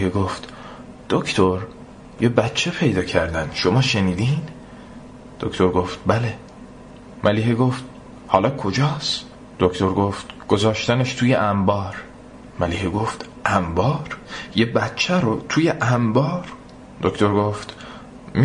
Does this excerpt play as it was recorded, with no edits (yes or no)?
yes